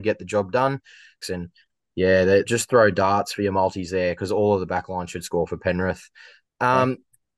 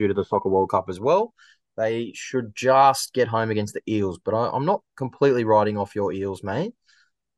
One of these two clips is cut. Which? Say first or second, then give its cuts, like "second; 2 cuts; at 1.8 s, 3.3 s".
first; 3 cuts; at 1.2 s, 2.4 s, 6.5 s